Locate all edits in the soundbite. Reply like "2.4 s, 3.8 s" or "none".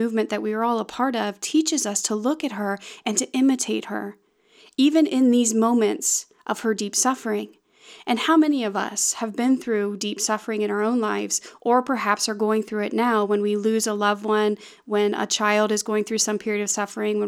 none